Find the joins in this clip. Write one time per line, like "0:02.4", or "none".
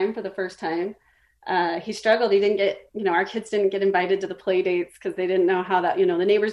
none